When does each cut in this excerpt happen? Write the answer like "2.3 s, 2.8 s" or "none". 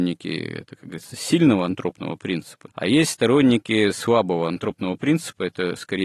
2.7 s